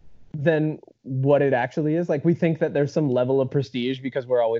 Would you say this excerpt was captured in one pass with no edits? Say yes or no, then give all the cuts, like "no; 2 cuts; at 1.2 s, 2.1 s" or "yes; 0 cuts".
yes; 0 cuts